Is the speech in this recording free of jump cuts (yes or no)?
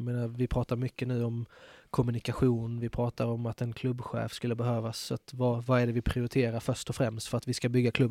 yes